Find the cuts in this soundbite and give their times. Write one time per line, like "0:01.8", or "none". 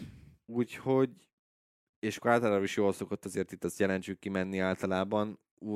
none